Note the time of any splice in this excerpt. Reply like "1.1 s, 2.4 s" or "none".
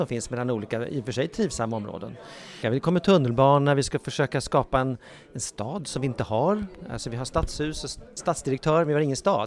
2.6 s